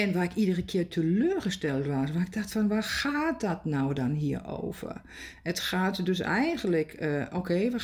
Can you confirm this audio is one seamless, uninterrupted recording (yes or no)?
yes